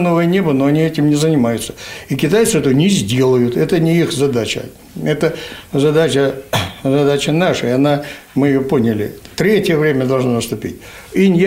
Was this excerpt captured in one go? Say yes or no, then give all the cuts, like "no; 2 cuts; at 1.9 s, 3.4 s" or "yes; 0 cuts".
yes; 0 cuts